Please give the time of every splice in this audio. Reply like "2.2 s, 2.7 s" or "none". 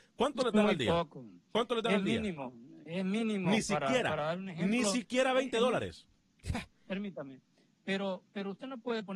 none